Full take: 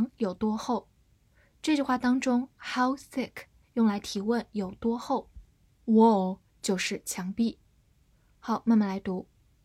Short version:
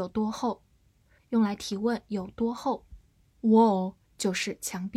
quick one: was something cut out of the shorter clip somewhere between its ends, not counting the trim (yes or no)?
yes